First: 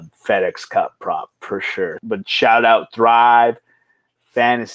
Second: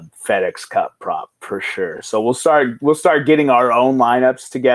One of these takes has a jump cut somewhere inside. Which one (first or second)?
first